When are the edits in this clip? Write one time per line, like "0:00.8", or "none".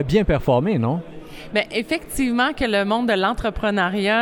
none